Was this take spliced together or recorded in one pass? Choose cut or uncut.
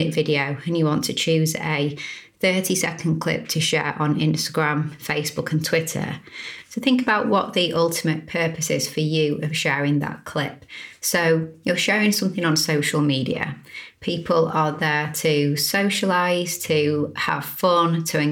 uncut